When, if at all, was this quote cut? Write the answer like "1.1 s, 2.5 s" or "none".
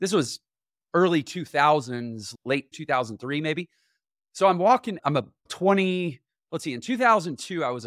2.7 s